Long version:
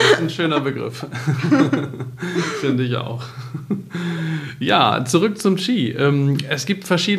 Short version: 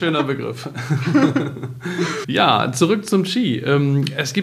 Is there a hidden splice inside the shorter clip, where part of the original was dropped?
yes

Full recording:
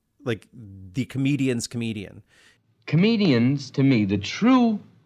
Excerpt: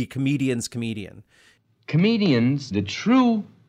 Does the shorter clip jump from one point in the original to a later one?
yes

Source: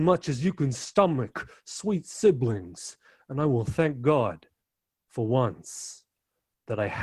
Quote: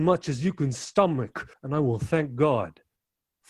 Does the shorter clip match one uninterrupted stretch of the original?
no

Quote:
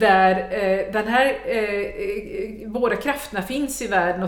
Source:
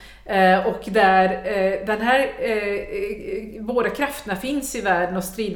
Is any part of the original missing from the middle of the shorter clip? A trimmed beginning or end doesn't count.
no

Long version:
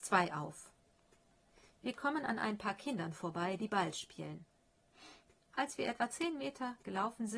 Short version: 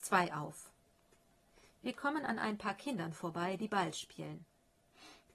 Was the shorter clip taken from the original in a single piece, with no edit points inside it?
yes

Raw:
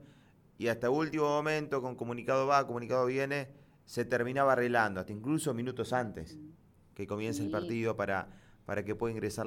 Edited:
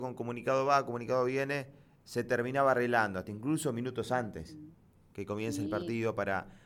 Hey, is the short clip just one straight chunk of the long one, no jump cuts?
yes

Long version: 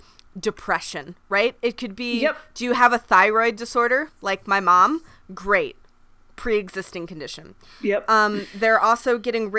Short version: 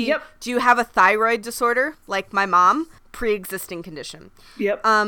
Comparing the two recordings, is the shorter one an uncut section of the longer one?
no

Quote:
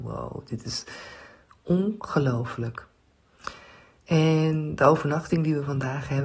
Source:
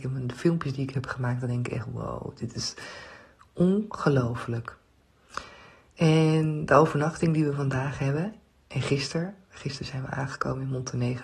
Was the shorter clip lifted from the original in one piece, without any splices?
yes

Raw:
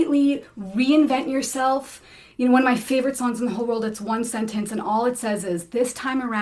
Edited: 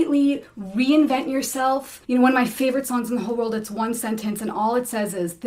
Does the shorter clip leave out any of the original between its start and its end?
yes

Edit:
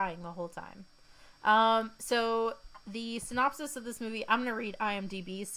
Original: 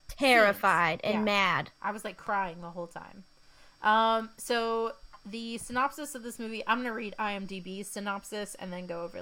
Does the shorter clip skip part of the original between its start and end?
no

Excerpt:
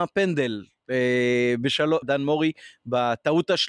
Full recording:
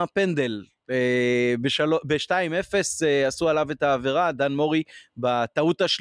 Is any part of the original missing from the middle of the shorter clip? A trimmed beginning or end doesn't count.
yes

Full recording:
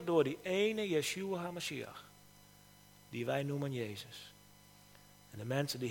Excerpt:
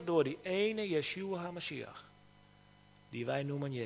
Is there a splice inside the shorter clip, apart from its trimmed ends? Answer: no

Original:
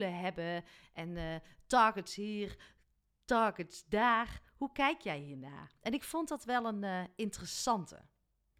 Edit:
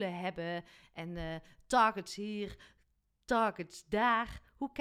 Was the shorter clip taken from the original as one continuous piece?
yes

